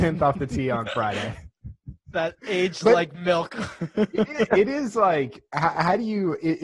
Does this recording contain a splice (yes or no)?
no